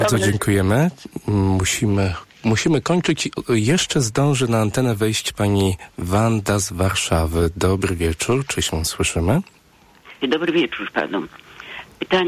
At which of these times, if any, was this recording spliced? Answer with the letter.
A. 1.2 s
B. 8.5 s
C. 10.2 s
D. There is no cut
C